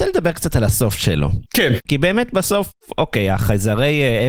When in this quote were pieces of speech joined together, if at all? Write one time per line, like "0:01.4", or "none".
none